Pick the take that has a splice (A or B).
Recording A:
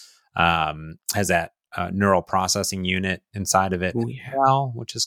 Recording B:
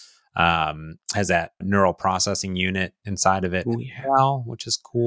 B